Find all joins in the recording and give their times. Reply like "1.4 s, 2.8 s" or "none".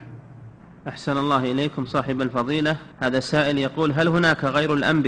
2.9 s

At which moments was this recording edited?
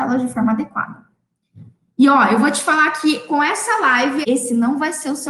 4.2 s

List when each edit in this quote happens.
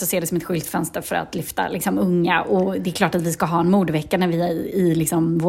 none

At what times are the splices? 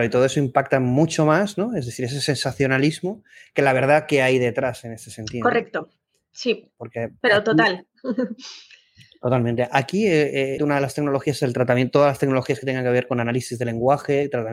10.6 s

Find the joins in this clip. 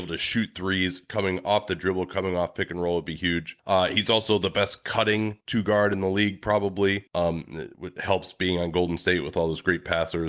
none

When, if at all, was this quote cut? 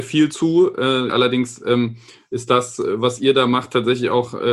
1.1 s

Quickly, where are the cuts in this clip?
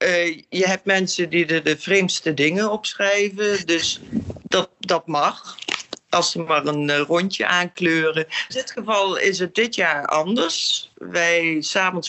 8.5 s

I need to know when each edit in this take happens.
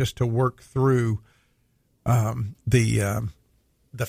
none

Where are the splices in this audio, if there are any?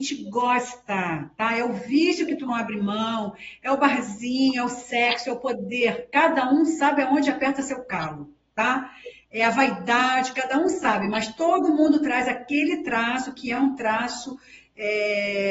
none

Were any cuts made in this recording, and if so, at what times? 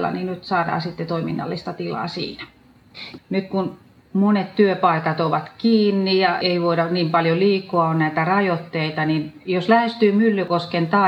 3.2 s, 6.4 s

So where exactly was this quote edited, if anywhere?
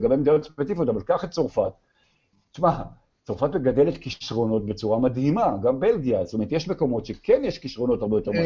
none

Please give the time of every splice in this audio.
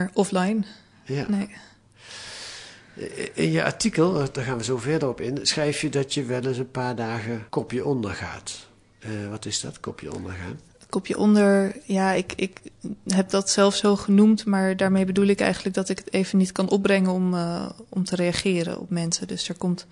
7.5 s

